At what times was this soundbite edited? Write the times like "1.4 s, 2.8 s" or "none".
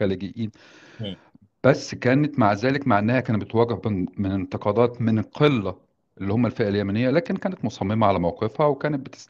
none